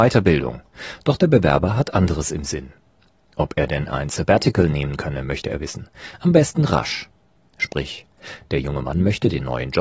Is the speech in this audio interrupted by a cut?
no; 0 cuts

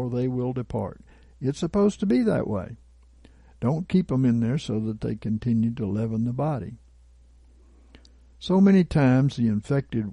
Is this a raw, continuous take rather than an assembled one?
yes; 0 cuts

